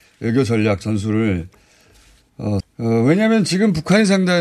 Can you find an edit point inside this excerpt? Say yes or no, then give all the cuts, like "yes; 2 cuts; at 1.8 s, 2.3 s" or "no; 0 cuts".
yes; 1 cut; at 2.6 s